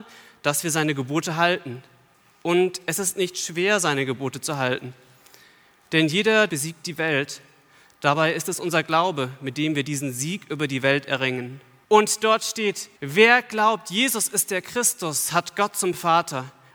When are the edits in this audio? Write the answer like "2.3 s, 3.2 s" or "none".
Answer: 6.5 s, 11.8 s, 13.0 s